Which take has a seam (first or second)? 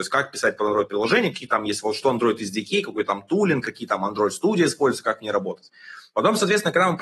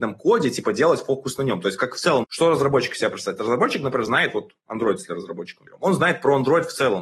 second